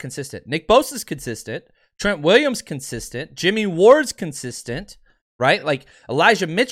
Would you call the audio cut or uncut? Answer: uncut